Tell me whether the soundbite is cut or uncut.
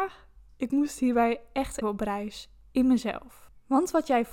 cut